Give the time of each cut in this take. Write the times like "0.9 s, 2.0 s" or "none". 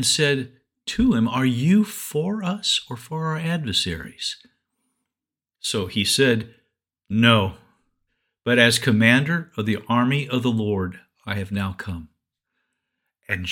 none